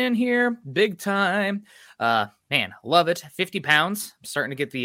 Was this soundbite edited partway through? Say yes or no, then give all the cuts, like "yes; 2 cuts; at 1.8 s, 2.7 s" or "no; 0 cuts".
no; 0 cuts